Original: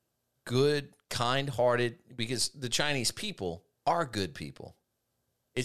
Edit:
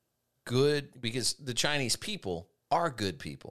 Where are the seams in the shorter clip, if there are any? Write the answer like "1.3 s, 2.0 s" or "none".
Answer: 0.9 s